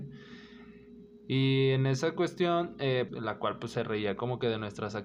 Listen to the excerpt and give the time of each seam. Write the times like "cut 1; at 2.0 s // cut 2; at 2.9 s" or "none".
cut 1; at 3.1 s